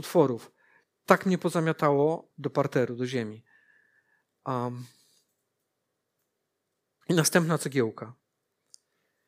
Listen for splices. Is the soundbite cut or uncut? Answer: cut